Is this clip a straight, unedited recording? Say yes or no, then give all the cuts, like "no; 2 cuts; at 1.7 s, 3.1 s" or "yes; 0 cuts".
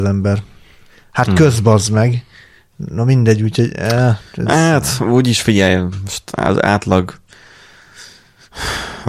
yes; 0 cuts